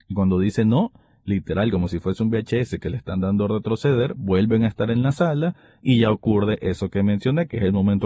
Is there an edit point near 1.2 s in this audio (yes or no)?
no